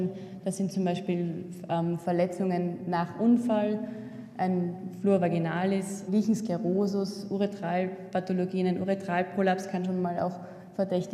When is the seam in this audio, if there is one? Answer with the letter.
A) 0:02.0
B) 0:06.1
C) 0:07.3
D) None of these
B